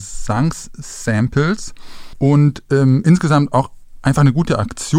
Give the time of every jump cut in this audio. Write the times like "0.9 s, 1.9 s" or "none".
none